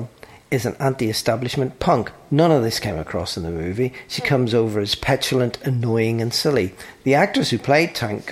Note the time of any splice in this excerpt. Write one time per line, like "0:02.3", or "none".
none